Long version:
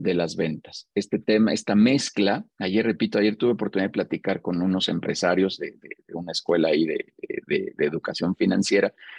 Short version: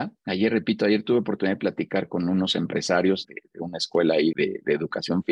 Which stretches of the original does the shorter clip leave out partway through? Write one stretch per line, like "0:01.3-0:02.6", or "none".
0:05.6-0:05.8
0:06.9-0:07.4